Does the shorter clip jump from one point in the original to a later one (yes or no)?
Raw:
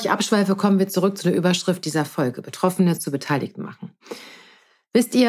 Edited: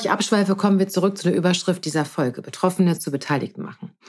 no